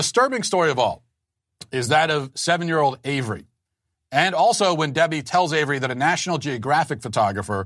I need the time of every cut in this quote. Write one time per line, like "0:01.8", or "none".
0:04.0